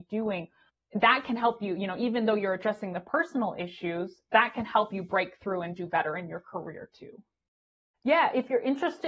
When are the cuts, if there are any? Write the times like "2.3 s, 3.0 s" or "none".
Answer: 7.9 s